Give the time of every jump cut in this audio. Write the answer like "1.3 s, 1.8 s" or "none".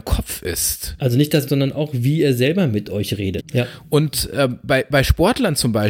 1.5 s, 3.4 s